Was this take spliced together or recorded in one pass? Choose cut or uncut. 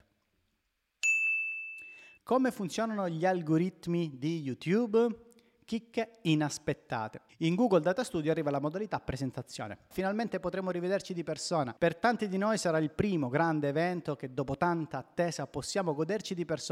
cut